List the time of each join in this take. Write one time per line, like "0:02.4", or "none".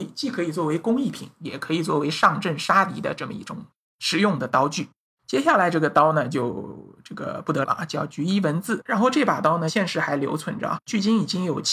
0:07.6
0:08.8

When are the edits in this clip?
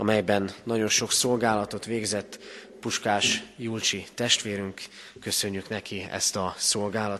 none

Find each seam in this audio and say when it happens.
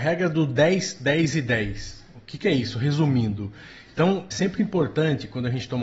0:04.3

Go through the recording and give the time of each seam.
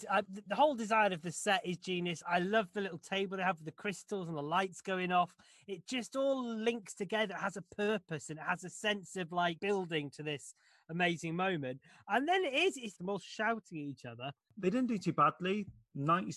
0:13.0
0:14.5

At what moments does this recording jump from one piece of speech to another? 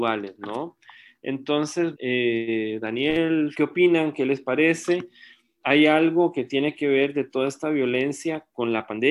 0:01.9
0:03.5

